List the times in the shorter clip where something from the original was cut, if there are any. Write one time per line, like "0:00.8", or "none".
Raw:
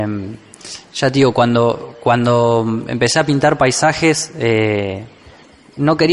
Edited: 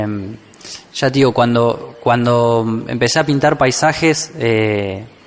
none